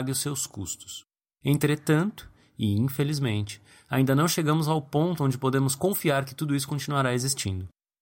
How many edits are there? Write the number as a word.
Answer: one